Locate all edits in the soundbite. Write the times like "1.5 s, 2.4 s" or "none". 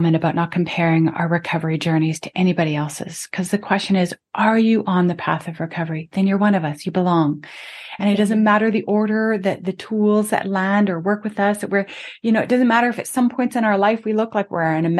none